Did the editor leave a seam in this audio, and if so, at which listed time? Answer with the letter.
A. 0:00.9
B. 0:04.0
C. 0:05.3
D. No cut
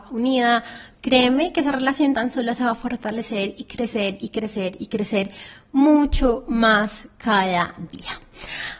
A